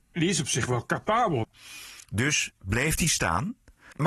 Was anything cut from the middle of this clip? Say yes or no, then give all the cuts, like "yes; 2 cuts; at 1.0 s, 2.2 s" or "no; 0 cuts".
yes; 1 cut; at 1.4 s